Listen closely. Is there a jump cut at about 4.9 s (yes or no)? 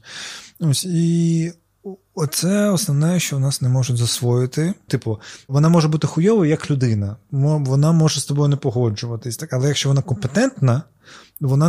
yes